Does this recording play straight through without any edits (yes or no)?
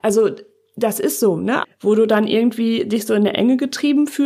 no